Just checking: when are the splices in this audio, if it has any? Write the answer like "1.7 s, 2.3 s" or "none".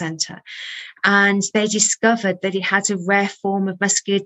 none